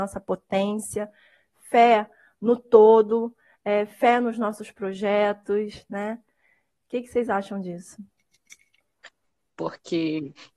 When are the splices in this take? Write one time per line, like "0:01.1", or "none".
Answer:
0:09.5

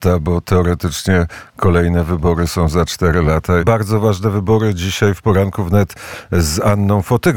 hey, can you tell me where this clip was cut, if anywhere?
0:03.6

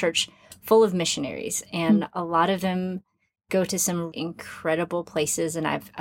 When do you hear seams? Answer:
0:04.1

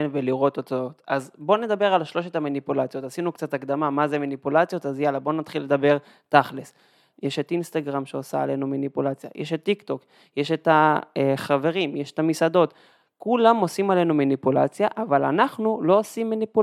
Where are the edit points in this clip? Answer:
0:07.1

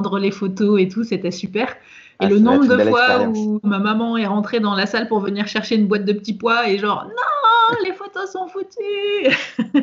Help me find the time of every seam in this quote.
none

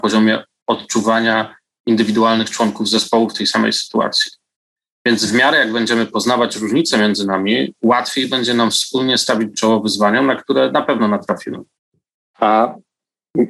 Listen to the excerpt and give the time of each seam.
0:12.3

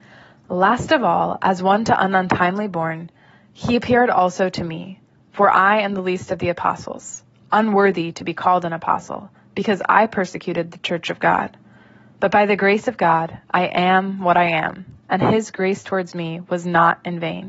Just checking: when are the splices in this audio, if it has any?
none

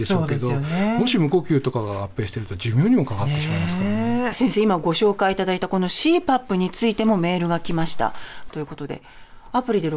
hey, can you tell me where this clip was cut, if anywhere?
0:08.5

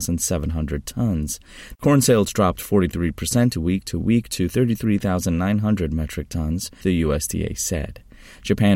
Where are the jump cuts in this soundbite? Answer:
0:01.7
0:06.8

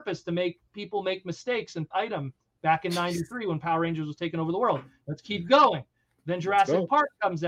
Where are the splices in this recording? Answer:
0:01.9

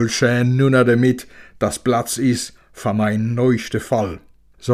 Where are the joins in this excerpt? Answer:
none

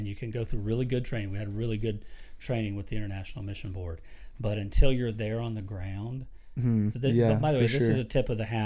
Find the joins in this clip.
0:06.9

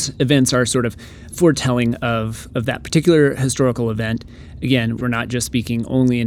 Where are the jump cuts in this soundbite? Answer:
0:01.3
0:05.0

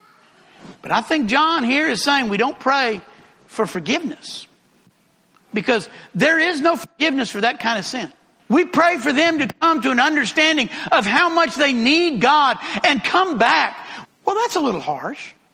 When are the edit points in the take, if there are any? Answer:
0:08.4
0:14.0

